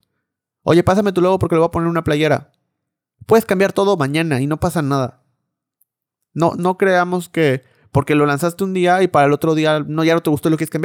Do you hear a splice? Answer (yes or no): yes